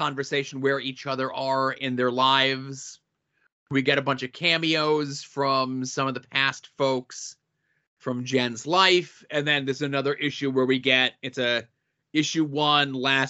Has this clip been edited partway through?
no; 0 cuts

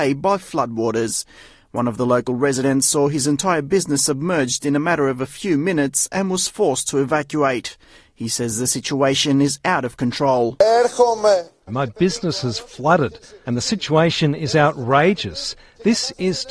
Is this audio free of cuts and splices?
no; 2 cuts; at 11.7 s, 13.4 s

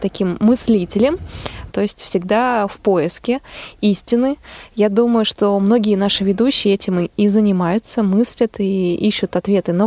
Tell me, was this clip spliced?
yes; 1 cut; at 1.7 s

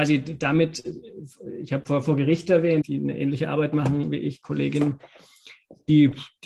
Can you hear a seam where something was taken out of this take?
yes; 1 cut; at 2.8 s

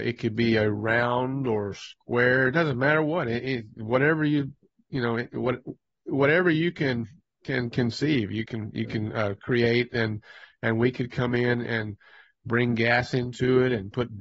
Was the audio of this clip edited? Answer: no; 0 cuts

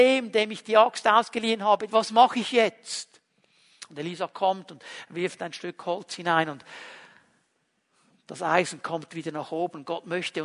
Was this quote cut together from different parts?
yes; 1 cut; at 1.9 s

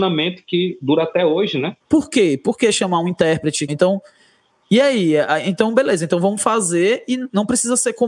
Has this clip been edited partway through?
yes; 2 cuts; at 1.8 s, 3.7 s

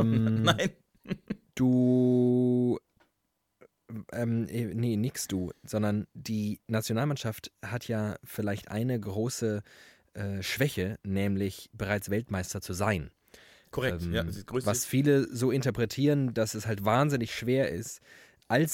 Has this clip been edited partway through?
no; 0 cuts

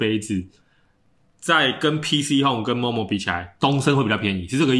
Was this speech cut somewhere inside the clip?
no; 0 cuts

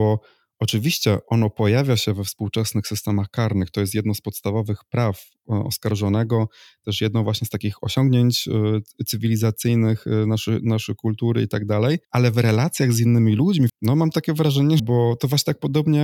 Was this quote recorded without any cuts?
no; 3 cuts; at 12.0 s, 13.7 s, 14.8 s

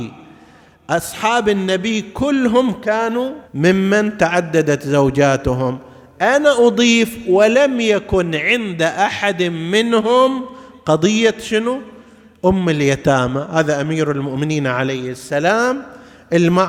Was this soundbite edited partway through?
yes; 1 cut; at 3.4 s

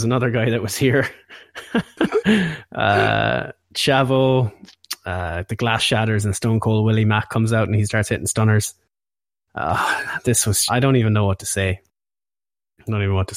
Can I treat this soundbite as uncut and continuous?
no; 1 cut; at 10.7 s

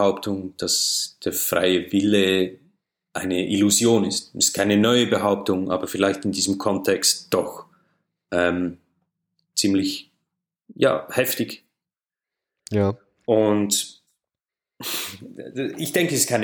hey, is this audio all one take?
yes; 0 cuts

